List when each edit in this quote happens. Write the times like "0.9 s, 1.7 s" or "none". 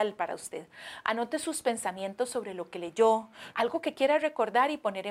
3.5 s